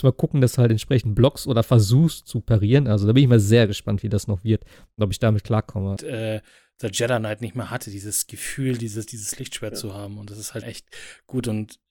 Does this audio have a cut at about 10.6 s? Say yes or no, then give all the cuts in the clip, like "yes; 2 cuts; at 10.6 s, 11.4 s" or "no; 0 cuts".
yes; 2 cuts; at 6.0 s, 10.6 s